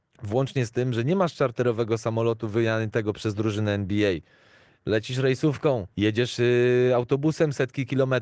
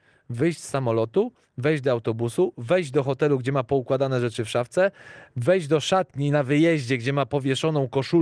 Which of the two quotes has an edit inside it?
first; 1 cut; at 5.9 s

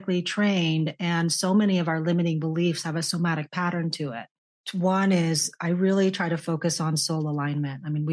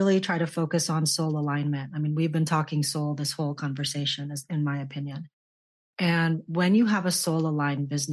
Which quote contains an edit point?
first; 2 cuts; at 2.8 s, 4.6 s

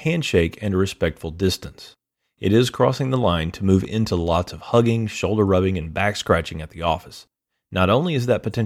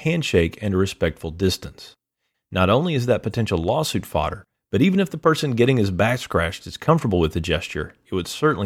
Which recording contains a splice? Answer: second; 1 cut; at 2.3 s

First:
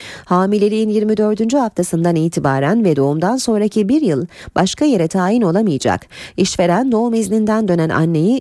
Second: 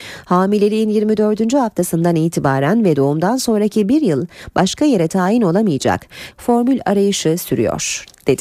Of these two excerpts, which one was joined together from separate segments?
second; 1 cut; at 6.3 s

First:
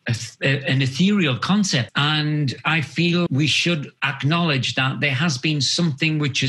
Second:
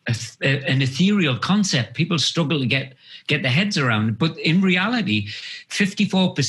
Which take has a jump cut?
first; 2 cuts; at 1.9 s, 3.3 s

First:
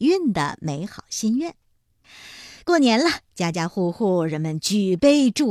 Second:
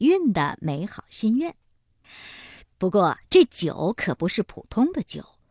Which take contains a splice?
second; 1 cut; at 2.6 s

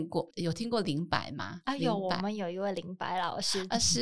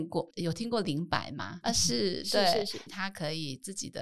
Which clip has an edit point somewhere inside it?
second; 2 cuts; at 1.6 s, 2.9 s

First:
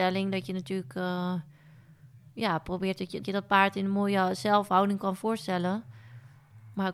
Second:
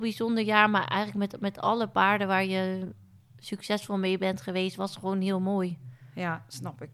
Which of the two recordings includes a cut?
first; 1 cut; at 3.2 s

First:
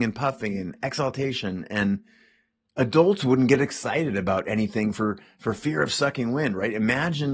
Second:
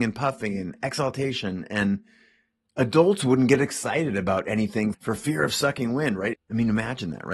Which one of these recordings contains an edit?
second; 2 cuts; at 4.9 s, 6.3 s

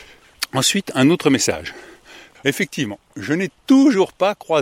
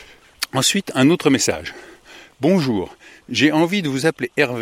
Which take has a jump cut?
first; 1 cut; at 2.4 s

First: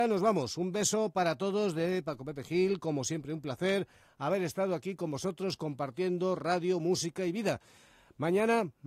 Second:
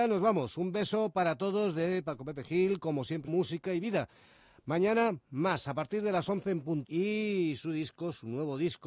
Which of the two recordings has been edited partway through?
second; 2 cuts; at 3.3 s, 6.8 s

